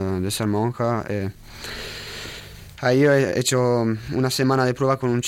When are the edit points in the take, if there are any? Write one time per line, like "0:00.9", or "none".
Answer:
none